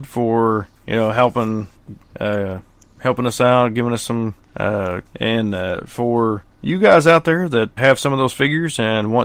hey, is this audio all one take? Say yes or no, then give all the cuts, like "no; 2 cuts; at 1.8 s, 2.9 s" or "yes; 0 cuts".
no; 2 cuts; at 5.0 s, 7.8 s